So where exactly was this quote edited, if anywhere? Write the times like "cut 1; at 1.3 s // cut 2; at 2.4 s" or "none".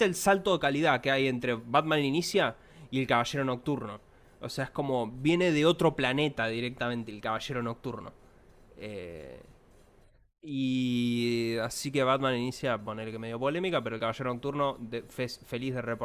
none